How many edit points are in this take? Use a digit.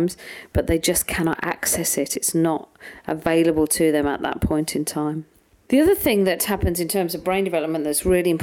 0